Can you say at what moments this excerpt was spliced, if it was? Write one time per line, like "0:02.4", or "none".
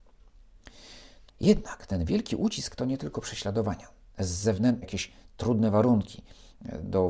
0:01.3
0:04.8

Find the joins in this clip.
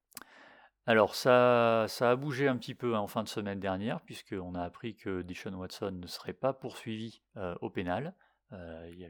none

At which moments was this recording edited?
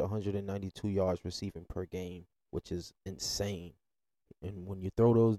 0:04.2

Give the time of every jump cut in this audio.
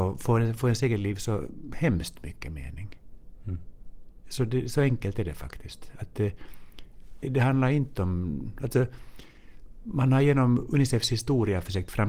0:07.2

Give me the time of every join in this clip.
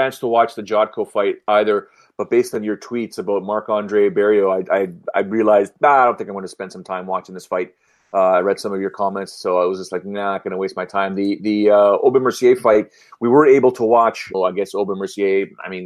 0:14.3

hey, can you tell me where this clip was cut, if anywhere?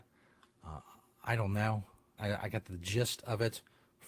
0:02.2

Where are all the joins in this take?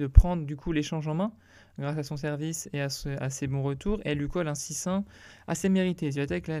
none

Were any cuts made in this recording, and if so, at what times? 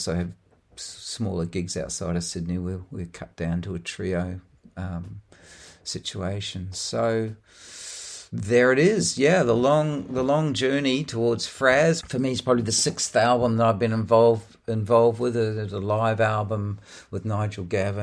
0:12.0

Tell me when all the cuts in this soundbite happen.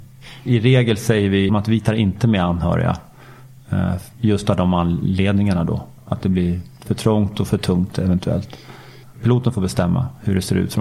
0:01.5
0:09.0

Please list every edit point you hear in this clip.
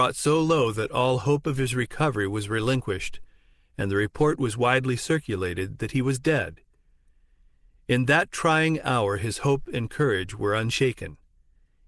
none

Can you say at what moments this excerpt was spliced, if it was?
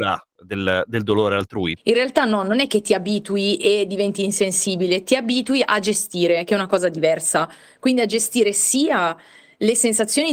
0:01.8

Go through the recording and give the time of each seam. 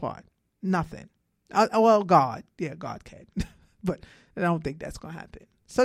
none

